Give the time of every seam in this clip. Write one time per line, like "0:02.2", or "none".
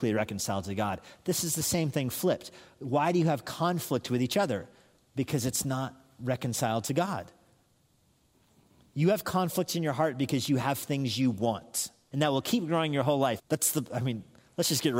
0:12.1
0:13.4